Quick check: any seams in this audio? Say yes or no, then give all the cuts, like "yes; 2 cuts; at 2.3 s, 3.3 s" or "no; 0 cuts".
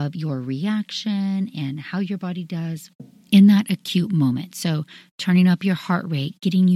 no; 0 cuts